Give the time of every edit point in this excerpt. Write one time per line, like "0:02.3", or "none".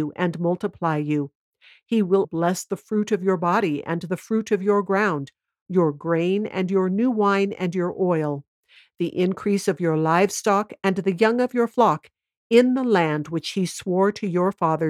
0:02.2